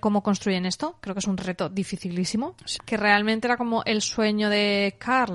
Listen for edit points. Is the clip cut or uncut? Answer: cut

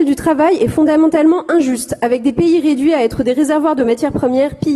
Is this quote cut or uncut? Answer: uncut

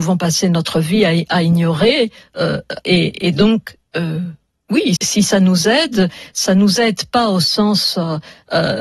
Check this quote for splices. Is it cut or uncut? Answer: cut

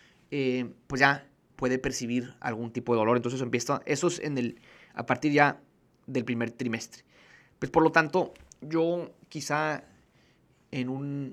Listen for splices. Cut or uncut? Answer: uncut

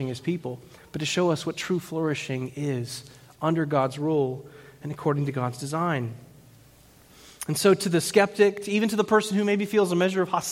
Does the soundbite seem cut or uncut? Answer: uncut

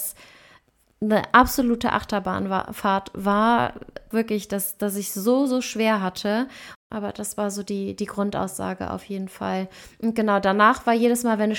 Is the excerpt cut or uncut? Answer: cut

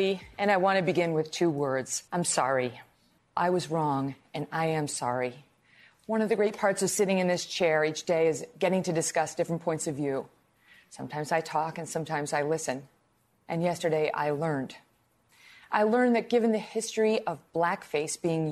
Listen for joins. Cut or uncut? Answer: cut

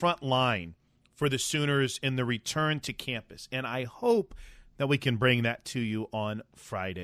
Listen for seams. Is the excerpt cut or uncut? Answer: uncut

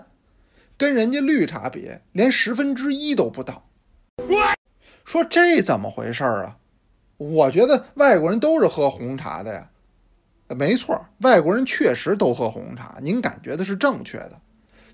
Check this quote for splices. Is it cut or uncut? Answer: uncut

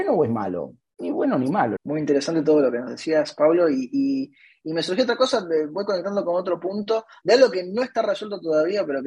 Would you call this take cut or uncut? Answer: cut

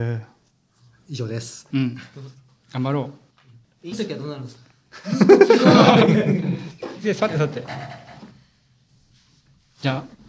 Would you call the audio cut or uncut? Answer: cut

